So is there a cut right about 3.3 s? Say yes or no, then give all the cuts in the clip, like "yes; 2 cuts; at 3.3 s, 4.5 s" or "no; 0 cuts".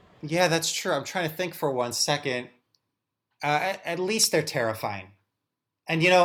yes; 1 cut; at 3.3 s